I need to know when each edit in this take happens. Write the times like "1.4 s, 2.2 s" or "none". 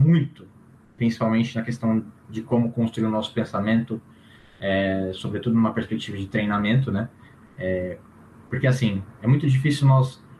none